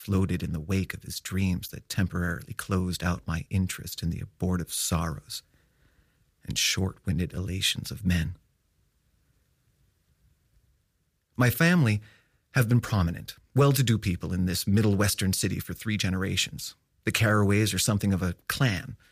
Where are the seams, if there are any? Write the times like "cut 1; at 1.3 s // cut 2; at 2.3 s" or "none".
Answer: none